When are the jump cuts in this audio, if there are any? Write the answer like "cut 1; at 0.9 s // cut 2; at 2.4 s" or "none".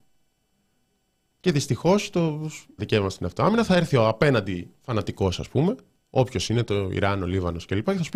cut 1; at 2.8 s